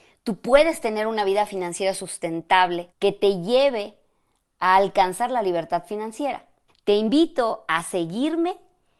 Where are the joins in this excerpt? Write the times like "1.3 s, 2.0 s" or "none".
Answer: 2.9 s, 6.7 s